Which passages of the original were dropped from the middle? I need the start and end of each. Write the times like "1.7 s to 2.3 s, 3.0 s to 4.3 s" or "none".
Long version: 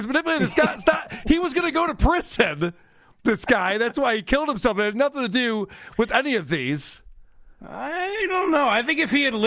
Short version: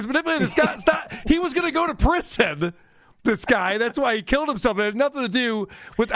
none